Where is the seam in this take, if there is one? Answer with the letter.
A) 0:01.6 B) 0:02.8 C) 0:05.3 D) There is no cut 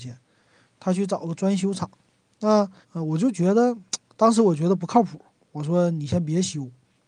B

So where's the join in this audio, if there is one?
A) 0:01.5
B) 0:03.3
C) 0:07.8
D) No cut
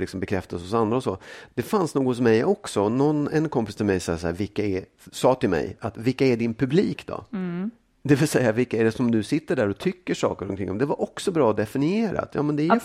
A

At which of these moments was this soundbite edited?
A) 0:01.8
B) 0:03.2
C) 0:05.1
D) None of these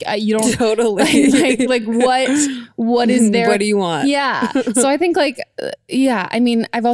D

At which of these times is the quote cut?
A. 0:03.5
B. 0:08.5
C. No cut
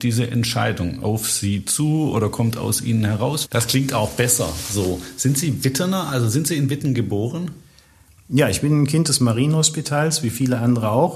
A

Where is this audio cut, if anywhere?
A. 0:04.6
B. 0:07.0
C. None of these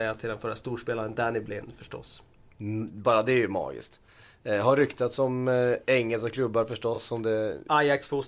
C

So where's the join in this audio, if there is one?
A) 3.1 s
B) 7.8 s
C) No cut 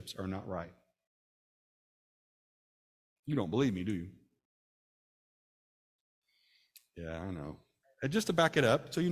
B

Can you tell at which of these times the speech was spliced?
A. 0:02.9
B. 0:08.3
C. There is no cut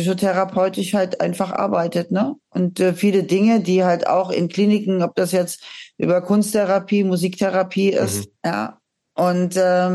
B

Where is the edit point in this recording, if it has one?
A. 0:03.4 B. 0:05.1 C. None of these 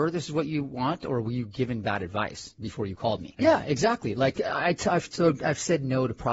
A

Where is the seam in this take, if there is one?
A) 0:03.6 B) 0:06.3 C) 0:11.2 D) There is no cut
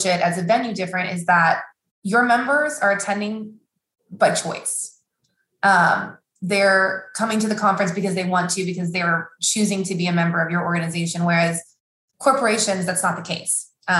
D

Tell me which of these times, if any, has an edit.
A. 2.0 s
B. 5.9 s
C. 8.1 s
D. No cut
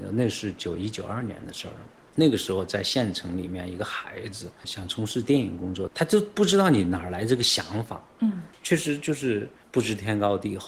B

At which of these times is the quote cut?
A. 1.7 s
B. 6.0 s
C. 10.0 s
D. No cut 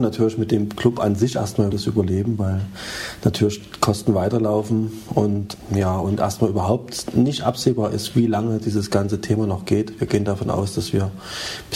A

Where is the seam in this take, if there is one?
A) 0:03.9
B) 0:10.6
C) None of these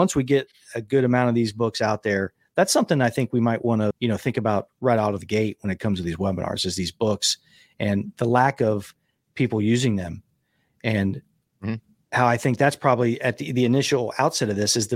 A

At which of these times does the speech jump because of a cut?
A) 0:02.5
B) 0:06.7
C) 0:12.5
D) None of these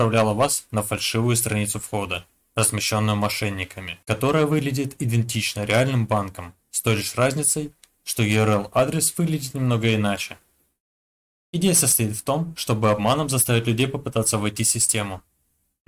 D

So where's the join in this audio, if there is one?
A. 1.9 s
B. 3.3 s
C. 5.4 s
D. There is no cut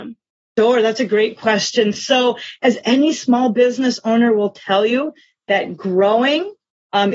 D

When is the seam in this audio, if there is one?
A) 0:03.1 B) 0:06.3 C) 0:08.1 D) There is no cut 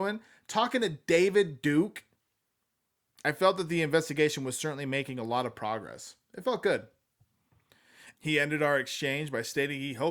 C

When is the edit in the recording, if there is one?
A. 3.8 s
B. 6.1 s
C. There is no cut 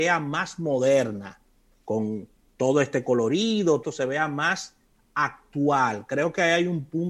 A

